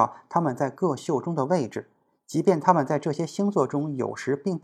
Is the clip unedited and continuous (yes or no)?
yes